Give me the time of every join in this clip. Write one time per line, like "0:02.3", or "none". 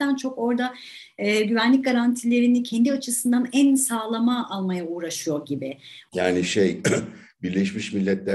0:06.1

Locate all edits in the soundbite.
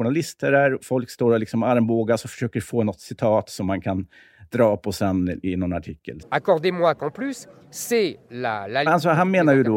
0:06.2
0:08.9

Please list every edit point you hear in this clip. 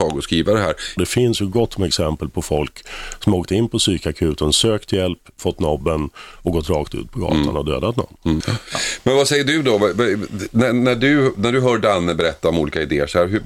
0:01.0
0:08.4

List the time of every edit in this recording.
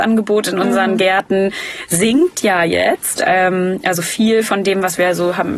none

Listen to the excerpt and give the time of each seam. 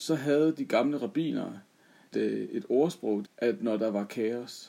0:02.1
0:03.2

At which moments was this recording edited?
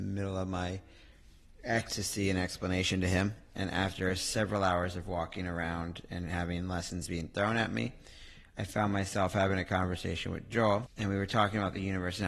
0:03.5

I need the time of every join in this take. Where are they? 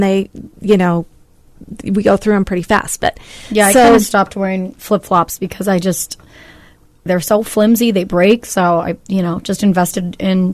0:07.1

